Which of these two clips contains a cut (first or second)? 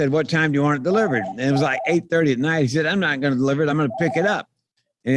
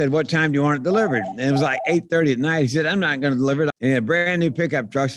second